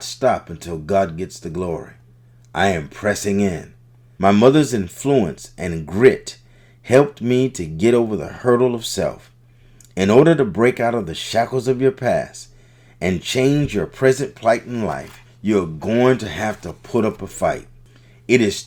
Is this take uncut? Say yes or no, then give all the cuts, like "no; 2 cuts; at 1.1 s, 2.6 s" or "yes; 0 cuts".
no; 1 cut; at 4.2 s